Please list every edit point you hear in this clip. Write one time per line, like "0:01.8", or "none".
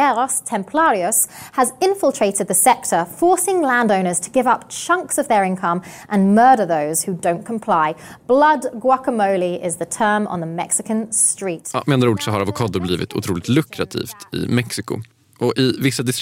none